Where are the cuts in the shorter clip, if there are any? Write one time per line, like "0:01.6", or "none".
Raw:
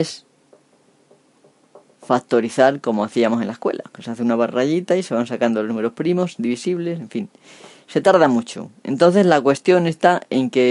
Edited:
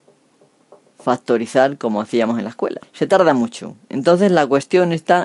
0:02.8